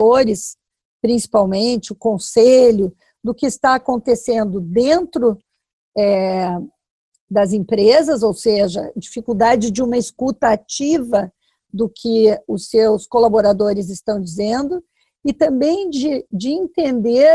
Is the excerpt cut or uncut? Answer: uncut